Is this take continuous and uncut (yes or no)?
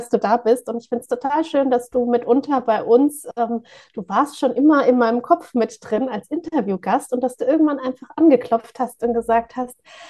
yes